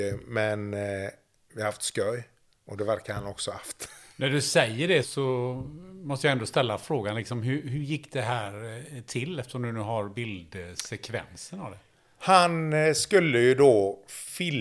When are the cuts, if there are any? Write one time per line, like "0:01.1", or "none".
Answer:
0:05.0

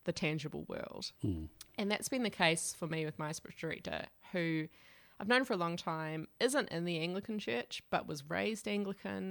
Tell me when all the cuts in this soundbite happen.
0:01.2

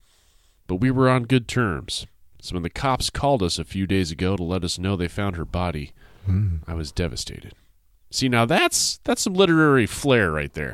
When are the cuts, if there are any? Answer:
none

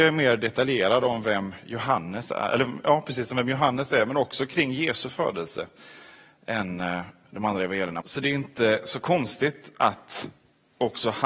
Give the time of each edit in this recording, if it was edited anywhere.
0:08.0

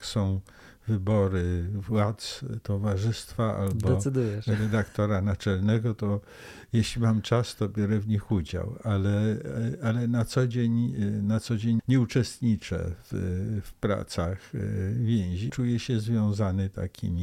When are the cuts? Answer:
0:11.8
0:15.5

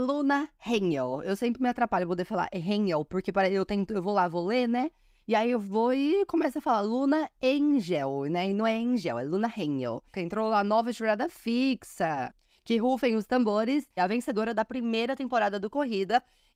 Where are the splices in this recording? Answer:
0:10.1
0:14.0

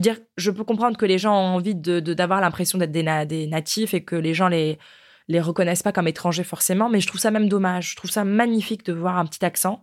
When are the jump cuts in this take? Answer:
none

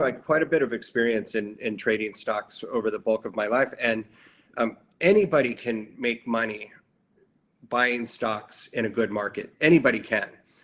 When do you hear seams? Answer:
none

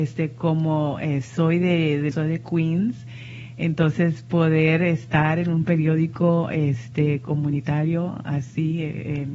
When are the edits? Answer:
0:02.1

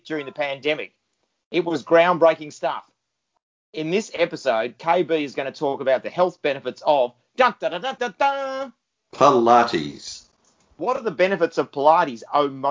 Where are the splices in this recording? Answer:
0:08.0

